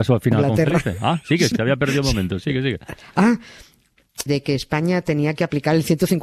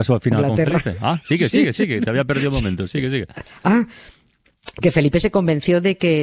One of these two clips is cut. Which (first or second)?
first